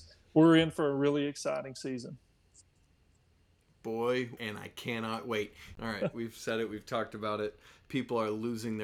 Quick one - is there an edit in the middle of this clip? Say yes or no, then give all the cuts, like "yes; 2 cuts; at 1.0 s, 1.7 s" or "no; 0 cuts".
yes; 2 cuts; at 4.4 s, 5.7 s